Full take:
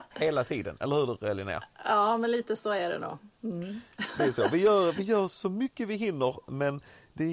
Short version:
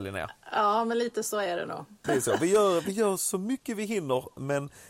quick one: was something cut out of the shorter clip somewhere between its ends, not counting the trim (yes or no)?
yes